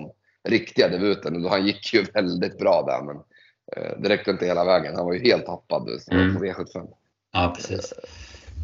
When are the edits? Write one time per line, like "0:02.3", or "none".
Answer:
0:06.1